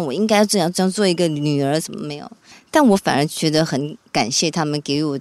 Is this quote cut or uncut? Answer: cut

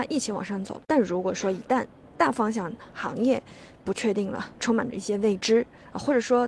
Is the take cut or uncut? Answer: cut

